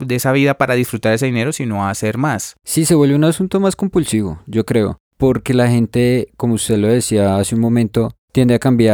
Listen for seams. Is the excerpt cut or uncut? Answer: uncut